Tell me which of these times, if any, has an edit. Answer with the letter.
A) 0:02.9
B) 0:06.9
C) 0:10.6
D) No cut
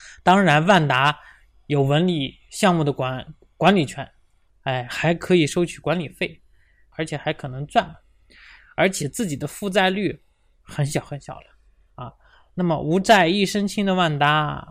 B